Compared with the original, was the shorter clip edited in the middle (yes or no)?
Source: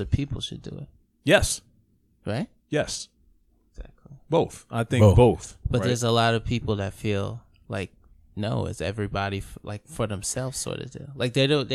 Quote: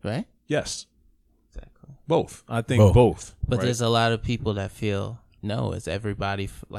yes